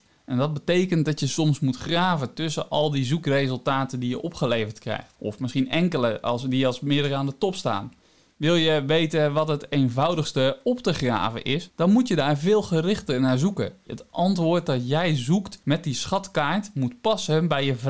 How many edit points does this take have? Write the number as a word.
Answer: two